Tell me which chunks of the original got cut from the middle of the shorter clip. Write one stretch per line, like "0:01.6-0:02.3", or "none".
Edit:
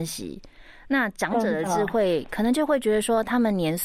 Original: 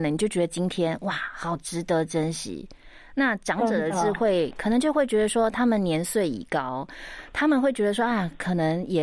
none